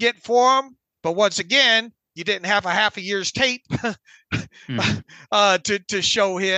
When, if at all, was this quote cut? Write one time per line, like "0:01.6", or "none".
0:00.9